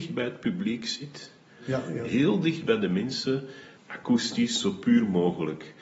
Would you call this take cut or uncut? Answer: cut